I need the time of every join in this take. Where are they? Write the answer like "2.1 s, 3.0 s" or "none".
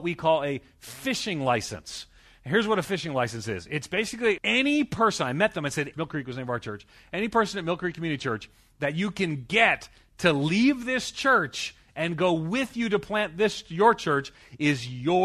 4.4 s, 5.9 s